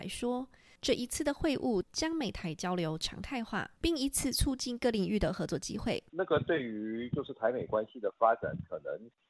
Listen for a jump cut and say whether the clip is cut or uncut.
cut